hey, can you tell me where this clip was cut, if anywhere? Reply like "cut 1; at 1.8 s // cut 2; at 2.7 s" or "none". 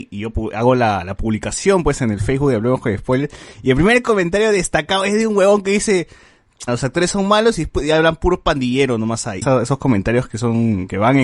cut 1; at 6.7 s // cut 2; at 9.4 s

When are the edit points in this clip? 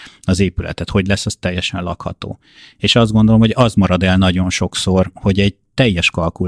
none

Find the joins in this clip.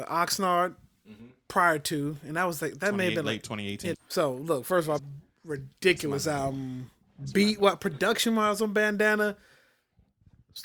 cut 1; at 3.9 s // cut 2; at 5.0 s

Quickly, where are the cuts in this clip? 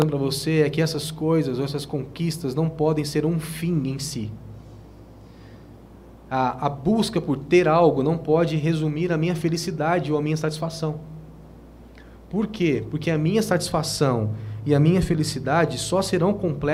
none

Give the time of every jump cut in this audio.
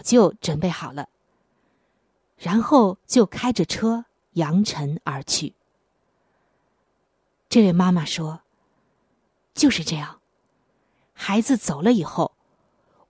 none

